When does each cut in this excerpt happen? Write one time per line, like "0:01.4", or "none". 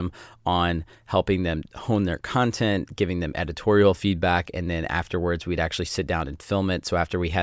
none